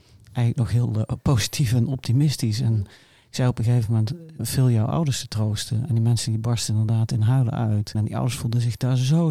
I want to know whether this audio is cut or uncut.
cut